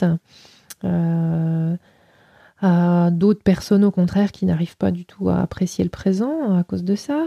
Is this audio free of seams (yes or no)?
no